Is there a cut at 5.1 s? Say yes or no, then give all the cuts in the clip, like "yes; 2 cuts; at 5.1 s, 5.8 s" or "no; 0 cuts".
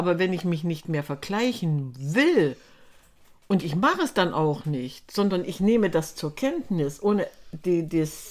no; 0 cuts